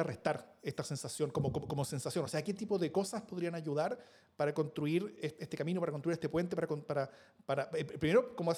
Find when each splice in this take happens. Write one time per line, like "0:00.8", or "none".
none